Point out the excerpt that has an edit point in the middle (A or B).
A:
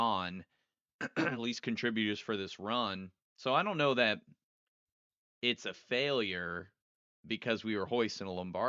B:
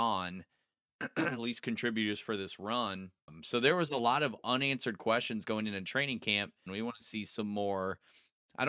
B